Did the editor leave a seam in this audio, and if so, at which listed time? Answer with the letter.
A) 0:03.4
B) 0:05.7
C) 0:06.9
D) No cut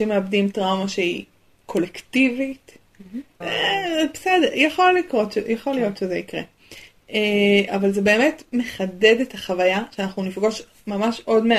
A